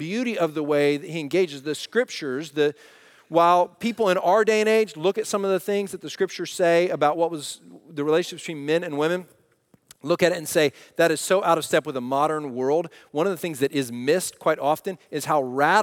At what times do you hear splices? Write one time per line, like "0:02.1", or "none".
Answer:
none